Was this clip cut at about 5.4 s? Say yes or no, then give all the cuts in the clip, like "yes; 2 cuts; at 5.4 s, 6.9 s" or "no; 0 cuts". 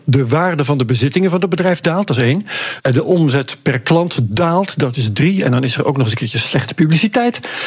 no; 1 cut; at 2.8 s